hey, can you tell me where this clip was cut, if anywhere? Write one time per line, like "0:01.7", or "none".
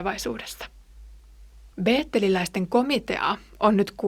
0:01.7